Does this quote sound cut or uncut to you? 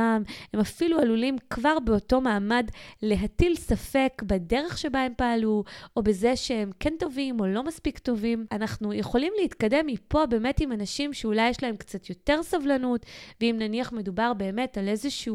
uncut